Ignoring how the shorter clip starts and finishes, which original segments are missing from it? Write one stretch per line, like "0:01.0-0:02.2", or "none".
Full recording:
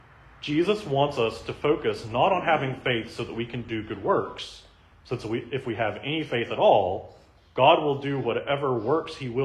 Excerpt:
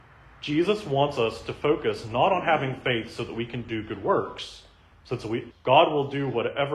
0:05.5-0:07.4

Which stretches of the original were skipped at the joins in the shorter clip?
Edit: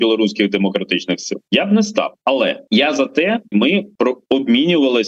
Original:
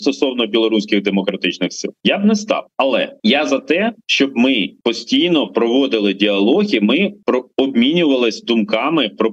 0:04.0-0:06.8

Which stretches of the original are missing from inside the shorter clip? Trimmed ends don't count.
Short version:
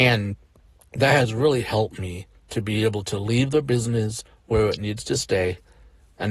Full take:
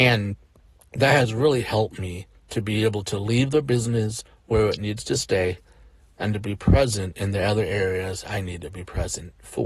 none

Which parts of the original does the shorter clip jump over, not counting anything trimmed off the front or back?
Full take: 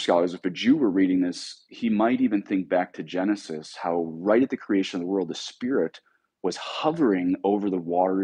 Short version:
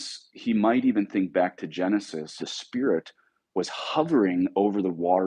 0:03.8-0:05.3

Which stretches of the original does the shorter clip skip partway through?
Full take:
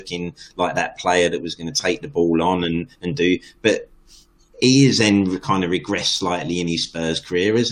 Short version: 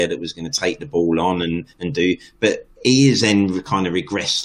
0:03.9-0:04.5

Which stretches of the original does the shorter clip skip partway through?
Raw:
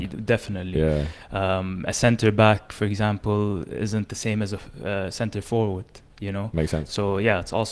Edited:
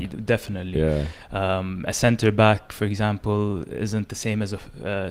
none

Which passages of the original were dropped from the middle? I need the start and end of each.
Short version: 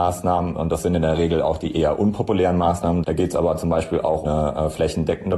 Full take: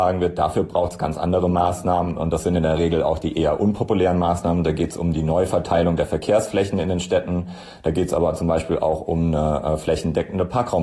0:04.6-0:07.8
0:09.0-0:09.3

